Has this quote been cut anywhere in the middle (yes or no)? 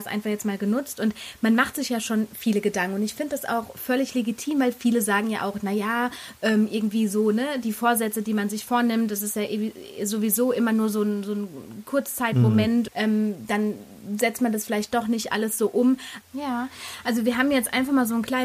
yes